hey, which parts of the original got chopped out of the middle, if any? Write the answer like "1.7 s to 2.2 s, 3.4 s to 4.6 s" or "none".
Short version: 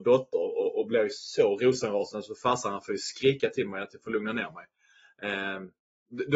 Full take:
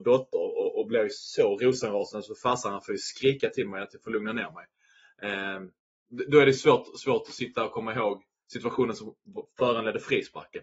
none